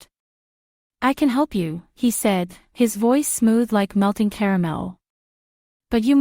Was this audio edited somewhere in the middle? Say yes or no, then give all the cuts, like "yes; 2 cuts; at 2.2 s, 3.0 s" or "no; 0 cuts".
no; 0 cuts